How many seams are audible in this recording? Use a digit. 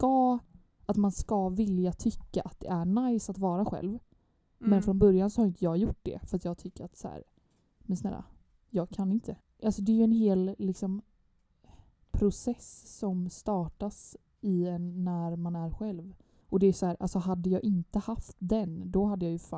2